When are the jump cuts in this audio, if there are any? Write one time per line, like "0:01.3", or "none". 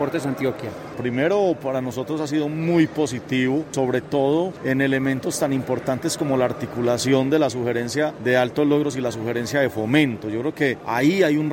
none